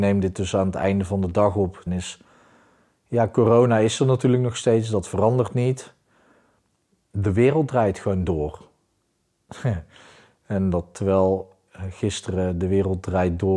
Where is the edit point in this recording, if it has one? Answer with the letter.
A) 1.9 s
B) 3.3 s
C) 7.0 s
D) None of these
A